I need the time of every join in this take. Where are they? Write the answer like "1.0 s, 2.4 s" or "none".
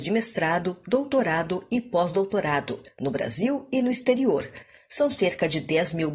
none